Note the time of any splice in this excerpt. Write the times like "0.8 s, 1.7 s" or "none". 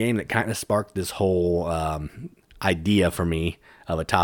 none